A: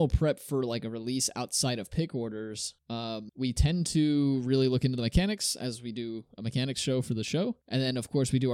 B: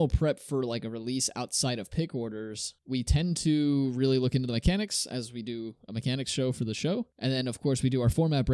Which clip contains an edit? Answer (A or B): B